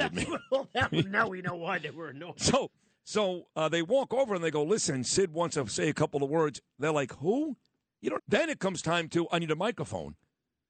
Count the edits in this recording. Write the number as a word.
two